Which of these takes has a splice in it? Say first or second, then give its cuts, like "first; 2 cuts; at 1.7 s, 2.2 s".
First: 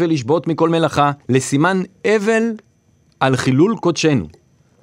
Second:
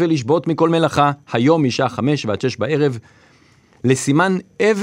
first; 1 cut; at 1.2 s